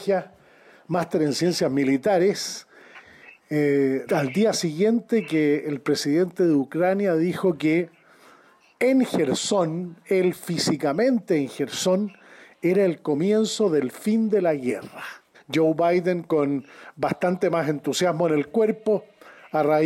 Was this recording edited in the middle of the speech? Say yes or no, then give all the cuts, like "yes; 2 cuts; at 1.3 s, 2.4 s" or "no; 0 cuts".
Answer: yes; 2 cuts; at 4.1 s, 15.3 s